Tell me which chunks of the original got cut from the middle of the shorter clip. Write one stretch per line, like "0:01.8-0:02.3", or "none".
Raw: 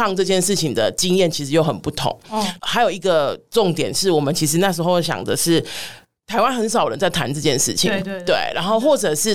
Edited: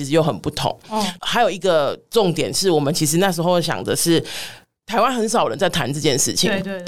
none